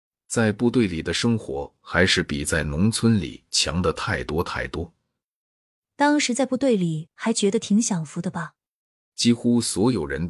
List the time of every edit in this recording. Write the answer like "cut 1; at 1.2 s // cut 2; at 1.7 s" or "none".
cut 1; at 9.1 s